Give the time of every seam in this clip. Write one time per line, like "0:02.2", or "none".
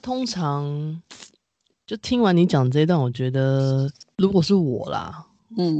none